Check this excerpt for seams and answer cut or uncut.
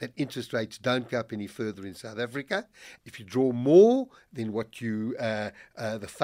cut